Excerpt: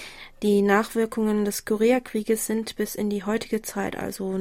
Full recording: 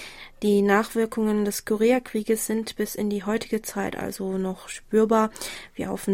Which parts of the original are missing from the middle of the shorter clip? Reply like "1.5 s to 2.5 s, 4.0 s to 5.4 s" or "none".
none